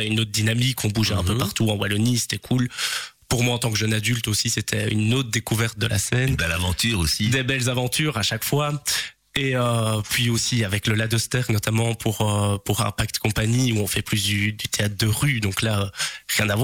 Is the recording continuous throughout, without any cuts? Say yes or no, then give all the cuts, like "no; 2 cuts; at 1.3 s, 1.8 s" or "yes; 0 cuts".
yes; 0 cuts